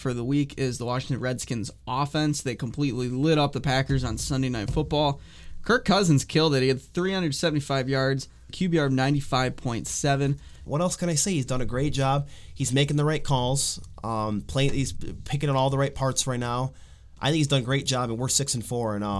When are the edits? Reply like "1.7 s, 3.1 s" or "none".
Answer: 8.5 s, 10.7 s